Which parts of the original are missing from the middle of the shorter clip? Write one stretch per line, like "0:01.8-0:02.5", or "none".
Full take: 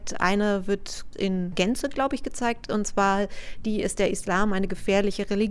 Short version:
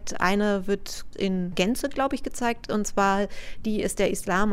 none

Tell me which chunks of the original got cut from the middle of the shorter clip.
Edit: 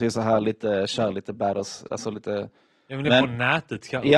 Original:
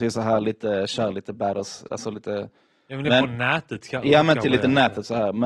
none

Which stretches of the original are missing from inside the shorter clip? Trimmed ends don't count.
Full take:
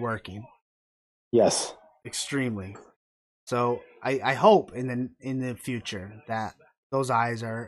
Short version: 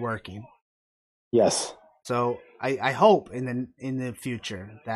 0:02.0-0:03.4

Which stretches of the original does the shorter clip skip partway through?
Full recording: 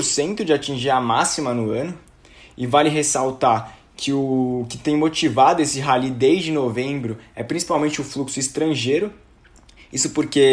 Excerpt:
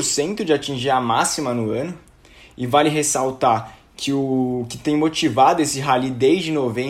none

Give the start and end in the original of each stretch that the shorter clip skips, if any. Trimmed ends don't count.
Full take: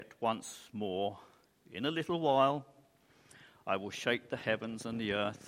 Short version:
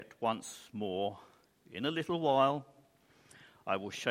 none

